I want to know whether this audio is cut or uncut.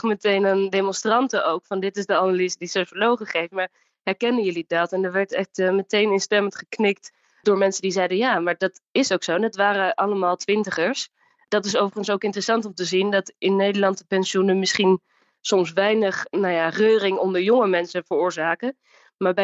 uncut